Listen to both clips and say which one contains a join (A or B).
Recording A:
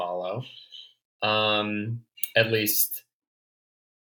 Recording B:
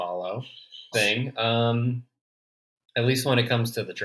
B